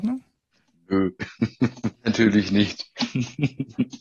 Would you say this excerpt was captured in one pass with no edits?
no; 1 cut; at 1.9 s

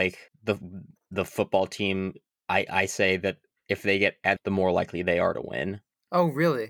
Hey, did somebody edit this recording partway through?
yes; 1 cut; at 4.4 s

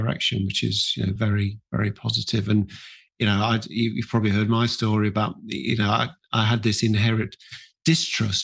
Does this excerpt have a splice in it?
no; 0 cuts

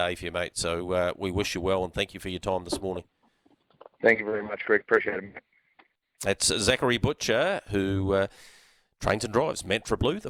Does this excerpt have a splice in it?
no; 0 cuts

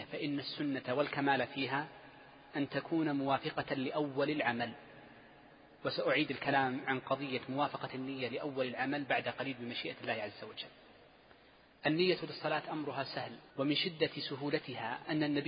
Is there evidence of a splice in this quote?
yes; 1 cut; at 13.5 s

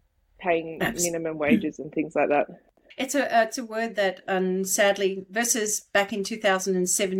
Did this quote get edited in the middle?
yes; 1 cut; at 2.9 s

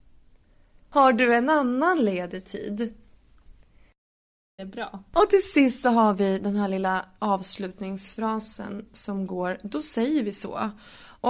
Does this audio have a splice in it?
yes; 1 cut; at 4.6 s

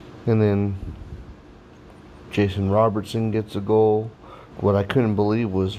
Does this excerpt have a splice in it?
yes; 1 cut; at 4.5 s

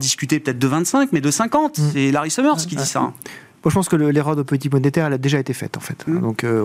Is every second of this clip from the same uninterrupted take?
yes; 0 cuts

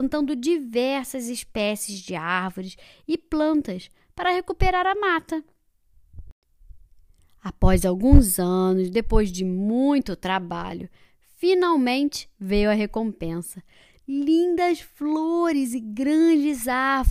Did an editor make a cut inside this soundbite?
no; 0 cuts

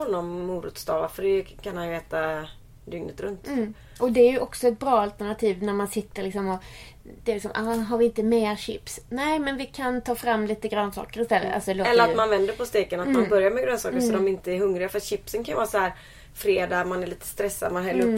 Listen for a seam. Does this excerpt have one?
no; 0 cuts

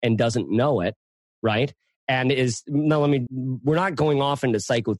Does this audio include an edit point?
yes; 1 cut; at 3.3 s

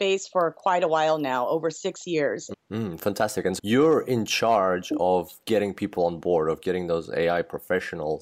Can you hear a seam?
yes; 2 cuts; at 2.5 s, 3.6 s

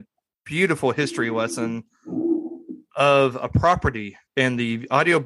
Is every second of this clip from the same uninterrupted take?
no; 1 cut; at 4.3 s

